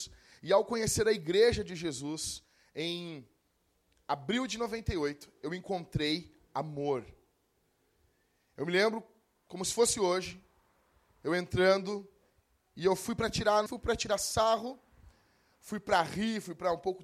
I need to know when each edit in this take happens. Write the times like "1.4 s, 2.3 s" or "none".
13.7 s